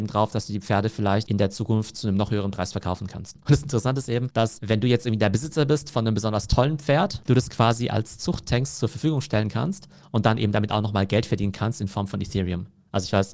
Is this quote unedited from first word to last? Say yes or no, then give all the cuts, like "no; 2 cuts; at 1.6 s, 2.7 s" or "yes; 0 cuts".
no; 2 cuts; at 3.4 s, 7.2 s